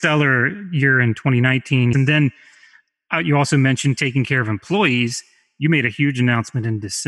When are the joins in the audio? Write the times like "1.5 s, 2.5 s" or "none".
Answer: 1.9 s

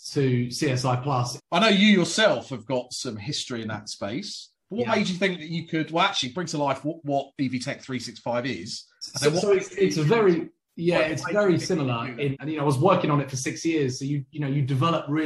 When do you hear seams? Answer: 1.4 s, 12.3 s

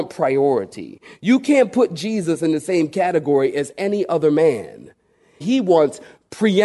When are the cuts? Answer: 5.4 s

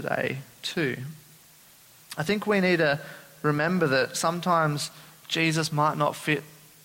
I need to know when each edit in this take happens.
none

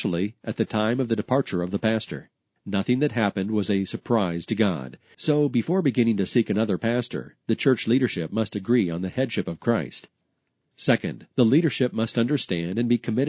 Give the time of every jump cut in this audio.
5.1 s

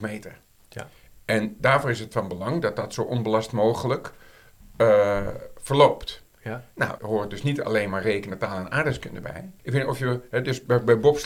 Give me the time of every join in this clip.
7.0 s, 9.6 s

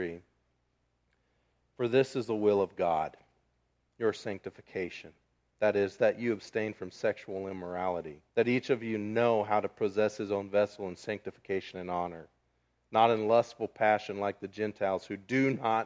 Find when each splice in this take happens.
8.3 s

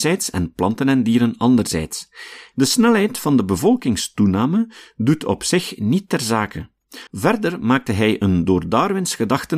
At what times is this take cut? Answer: 2.5 s, 7.1 s

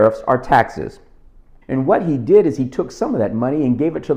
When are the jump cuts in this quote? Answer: 1.6 s

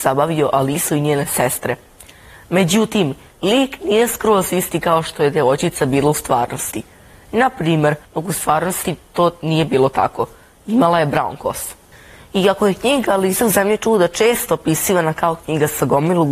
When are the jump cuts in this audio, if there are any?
8.0 s

